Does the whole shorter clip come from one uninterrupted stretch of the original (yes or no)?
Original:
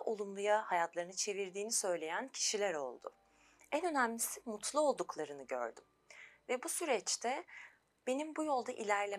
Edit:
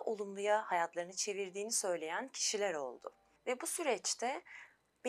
no